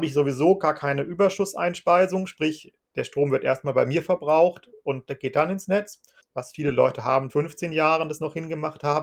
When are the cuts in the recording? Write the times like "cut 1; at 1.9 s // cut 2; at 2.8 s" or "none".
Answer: cut 1; at 6.2 s // cut 2; at 7.3 s